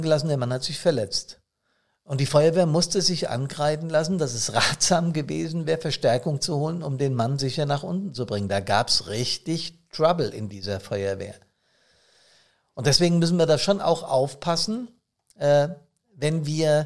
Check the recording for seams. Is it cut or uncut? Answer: uncut